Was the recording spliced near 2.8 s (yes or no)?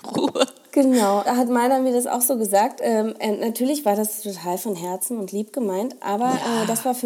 no